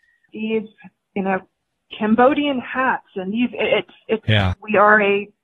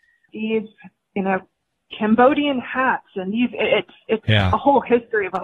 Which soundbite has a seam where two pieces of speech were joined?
first; 1 cut; at 4.5 s

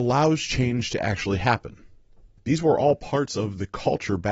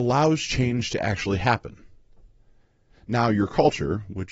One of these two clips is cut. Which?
first; 1 cut; at 2.4 s

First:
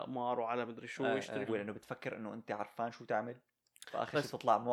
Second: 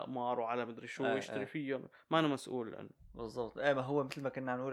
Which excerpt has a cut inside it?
first; 1 cut; at 1.5 s

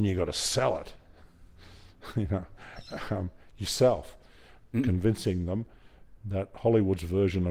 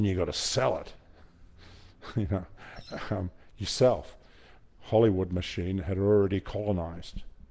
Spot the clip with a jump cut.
first; 1 cut; at 4.7 s

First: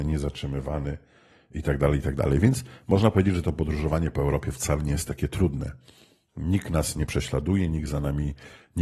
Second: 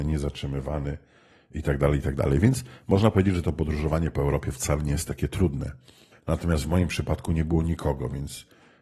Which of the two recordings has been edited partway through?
second; 1 cut; at 6.1 s

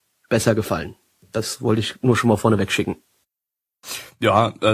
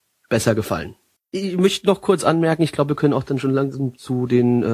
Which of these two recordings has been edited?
second; 1 cut; at 1.2 s

